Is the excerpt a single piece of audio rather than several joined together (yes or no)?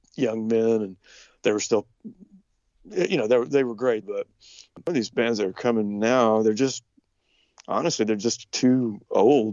no